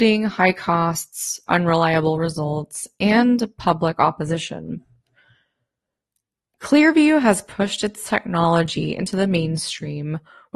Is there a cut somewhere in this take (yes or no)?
no